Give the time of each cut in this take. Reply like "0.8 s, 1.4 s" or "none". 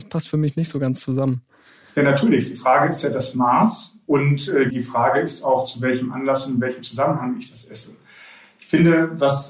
4.7 s